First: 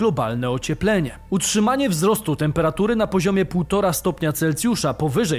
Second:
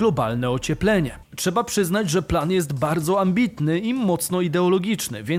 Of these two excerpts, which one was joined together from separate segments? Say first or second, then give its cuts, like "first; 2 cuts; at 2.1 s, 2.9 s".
second; 1 cut; at 1.2 s